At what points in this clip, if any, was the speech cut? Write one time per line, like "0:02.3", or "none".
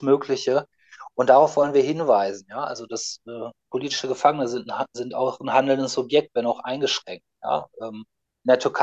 none